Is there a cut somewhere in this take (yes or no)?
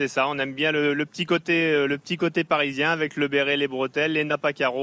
no